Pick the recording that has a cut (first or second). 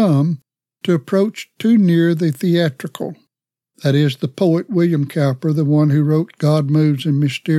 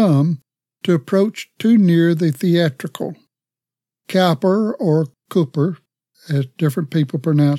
first